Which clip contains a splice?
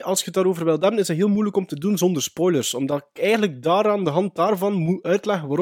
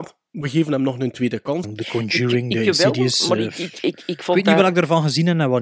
second; 1 cut; at 1.6 s

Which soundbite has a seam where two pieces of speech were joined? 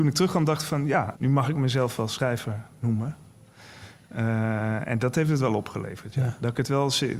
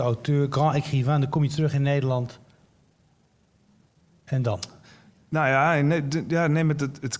first; 1 cut; at 1.1 s

